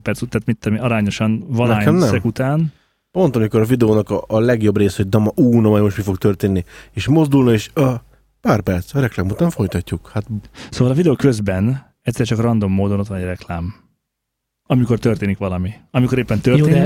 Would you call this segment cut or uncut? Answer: uncut